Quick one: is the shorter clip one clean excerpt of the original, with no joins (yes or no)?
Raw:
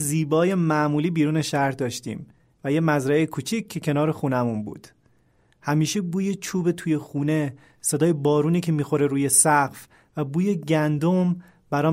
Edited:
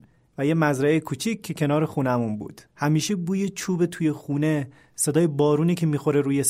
no